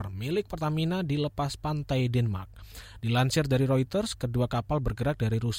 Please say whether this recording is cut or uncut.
uncut